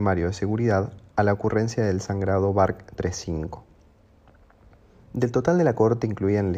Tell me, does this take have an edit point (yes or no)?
yes